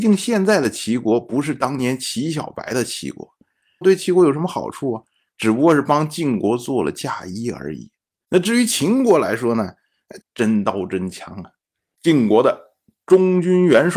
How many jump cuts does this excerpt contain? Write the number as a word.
two